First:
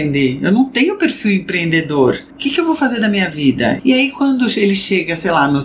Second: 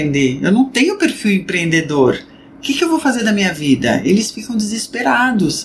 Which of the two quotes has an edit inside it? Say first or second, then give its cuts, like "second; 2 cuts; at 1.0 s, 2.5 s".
first; 2 cuts; at 2.3 s, 3.8 s